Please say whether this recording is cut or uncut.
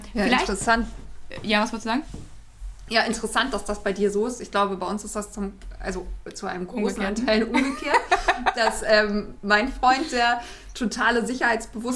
uncut